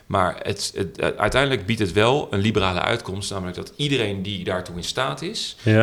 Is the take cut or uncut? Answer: uncut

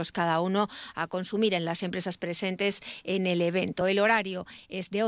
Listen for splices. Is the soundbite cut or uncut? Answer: uncut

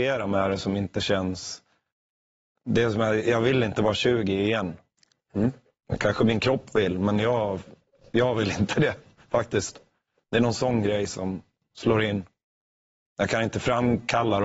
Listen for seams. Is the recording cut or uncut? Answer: uncut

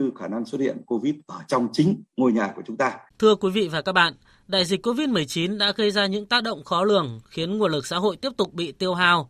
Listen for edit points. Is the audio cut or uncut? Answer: cut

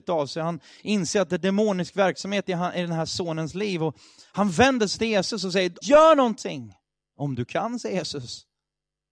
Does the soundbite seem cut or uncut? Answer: cut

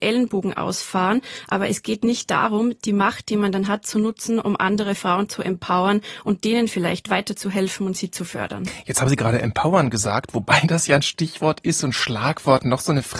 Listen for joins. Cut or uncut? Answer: uncut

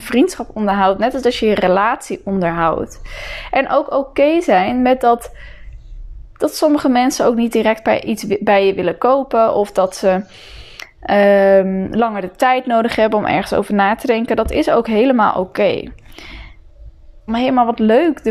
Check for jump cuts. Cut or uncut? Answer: cut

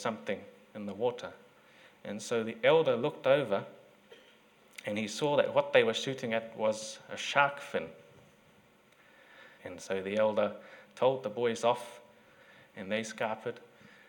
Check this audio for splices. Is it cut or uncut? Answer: cut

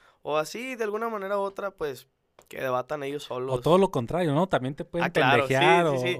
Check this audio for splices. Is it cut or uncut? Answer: uncut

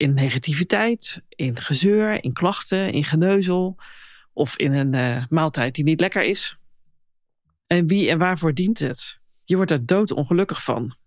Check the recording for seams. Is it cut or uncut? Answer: uncut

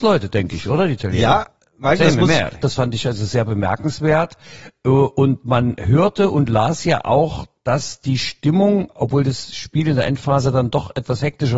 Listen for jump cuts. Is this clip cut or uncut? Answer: cut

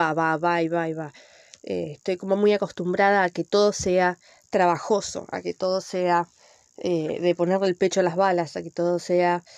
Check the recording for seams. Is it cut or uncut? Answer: uncut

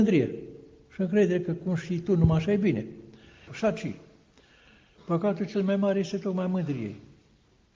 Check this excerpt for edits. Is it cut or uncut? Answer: cut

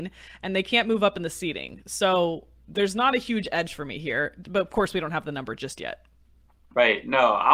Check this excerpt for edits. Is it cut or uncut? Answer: uncut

